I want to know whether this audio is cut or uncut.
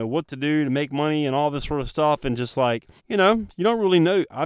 cut